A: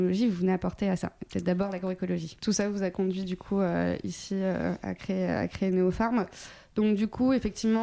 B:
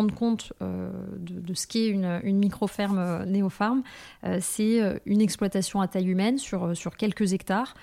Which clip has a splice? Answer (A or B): A